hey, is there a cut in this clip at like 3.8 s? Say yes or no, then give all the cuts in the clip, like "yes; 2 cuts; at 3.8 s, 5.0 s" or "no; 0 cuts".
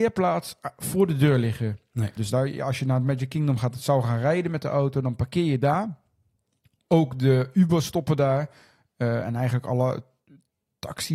no; 1 cut; at 2.2 s